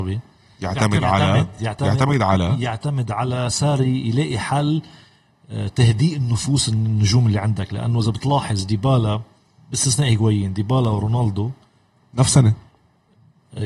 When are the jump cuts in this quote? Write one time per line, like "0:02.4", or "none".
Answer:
none